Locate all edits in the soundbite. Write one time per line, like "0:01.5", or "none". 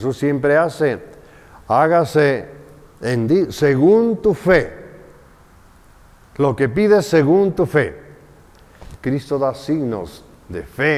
0:09.0